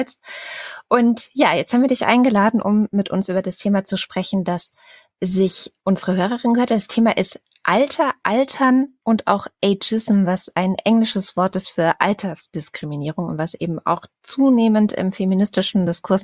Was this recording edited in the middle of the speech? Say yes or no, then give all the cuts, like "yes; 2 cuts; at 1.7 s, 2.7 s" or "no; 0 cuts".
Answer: no; 0 cuts